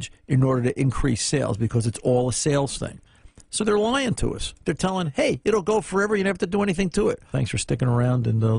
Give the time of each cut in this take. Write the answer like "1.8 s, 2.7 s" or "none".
7.3 s